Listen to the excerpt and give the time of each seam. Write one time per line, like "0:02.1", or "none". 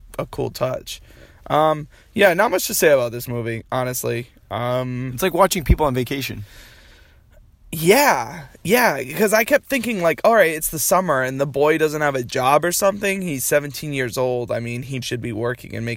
0:15.0